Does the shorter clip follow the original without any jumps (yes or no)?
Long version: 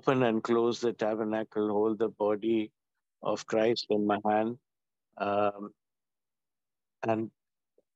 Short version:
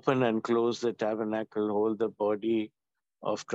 yes